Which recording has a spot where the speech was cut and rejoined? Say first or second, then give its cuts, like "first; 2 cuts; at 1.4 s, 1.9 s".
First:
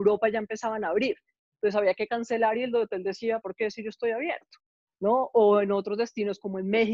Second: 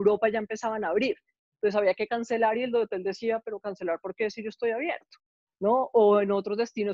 first; 1 cut; at 3.4 s